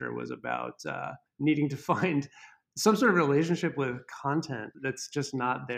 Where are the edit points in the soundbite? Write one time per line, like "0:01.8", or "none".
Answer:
0:01.3
0:04.7